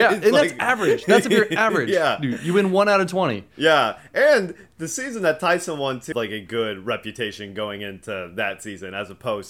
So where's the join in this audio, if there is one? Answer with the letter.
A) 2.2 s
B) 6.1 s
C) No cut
B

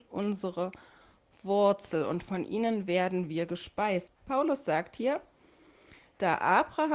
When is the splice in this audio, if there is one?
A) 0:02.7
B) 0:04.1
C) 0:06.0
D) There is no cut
B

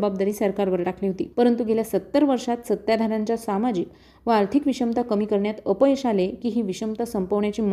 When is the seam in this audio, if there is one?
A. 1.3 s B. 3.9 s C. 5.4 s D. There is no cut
A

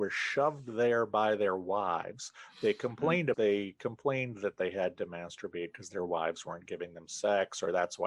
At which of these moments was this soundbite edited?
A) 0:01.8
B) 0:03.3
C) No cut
B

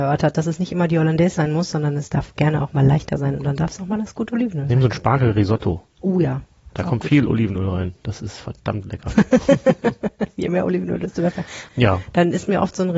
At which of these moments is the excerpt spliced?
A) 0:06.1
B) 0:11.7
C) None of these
B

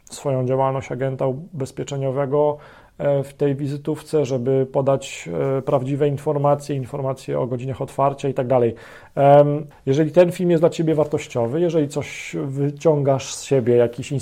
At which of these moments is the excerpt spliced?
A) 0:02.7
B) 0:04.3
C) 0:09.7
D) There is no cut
C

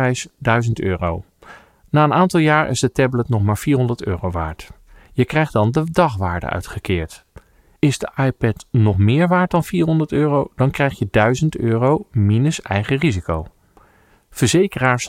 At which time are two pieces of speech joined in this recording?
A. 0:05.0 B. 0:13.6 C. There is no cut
C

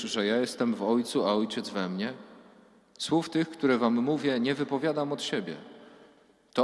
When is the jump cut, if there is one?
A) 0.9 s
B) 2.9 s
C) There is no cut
C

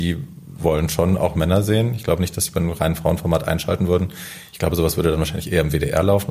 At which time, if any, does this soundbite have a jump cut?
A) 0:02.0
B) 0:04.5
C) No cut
C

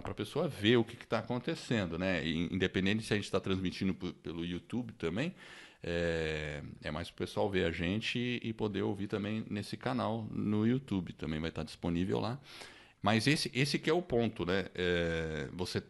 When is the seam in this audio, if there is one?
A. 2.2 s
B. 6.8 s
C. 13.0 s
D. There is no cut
C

